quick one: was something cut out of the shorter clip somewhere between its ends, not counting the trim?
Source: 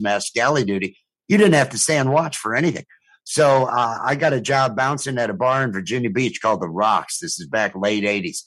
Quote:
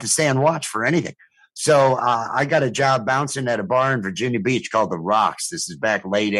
no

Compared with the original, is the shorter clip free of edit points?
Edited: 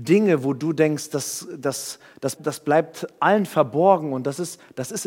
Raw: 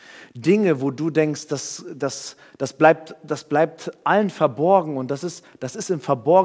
no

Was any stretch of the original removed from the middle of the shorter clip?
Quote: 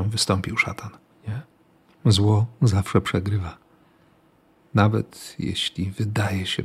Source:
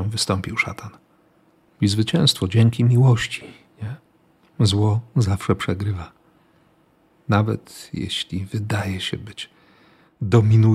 yes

